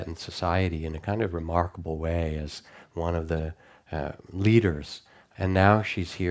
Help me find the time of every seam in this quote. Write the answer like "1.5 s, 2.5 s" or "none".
5.3 s